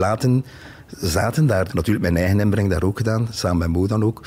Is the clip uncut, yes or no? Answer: no